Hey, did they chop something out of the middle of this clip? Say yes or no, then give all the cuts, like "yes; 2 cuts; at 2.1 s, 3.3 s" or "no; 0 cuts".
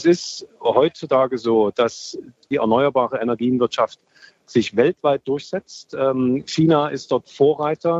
no; 0 cuts